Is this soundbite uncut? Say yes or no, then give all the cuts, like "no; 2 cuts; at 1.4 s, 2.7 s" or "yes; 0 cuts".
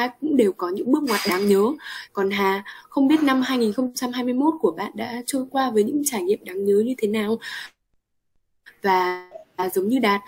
no; 1 cut; at 2.1 s